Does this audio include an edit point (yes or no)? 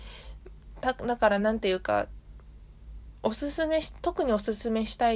no